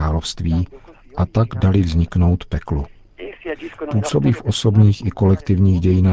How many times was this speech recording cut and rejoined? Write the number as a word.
zero